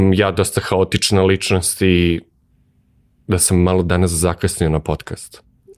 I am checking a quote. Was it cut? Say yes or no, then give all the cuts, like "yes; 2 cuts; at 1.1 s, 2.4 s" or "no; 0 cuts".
no; 0 cuts